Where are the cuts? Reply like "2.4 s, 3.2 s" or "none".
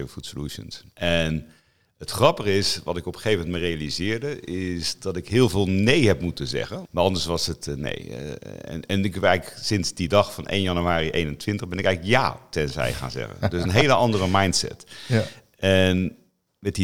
0.9 s, 6.8 s

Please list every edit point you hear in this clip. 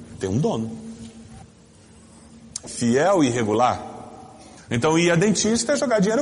2.6 s, 4.7 s

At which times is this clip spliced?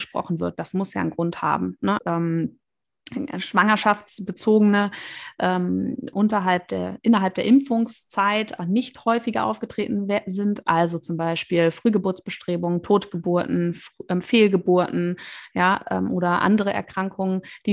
2.0 s, 6.1 s, 8.6 s

